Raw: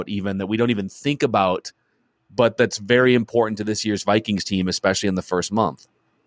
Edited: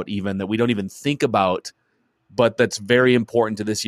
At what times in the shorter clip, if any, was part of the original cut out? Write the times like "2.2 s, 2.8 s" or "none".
none